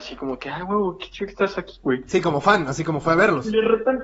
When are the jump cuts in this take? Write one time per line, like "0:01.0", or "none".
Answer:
none